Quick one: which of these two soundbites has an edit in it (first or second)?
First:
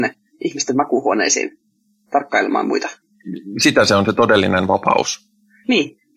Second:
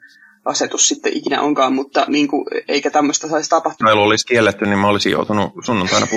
second